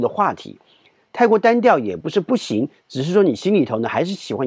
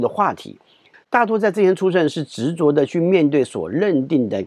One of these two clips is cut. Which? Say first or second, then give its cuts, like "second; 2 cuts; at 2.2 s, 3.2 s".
second; 1 cut; at 0.9 s